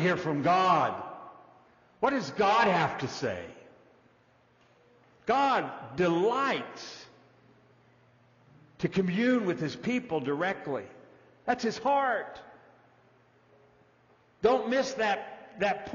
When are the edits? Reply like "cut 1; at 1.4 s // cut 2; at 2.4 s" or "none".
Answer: none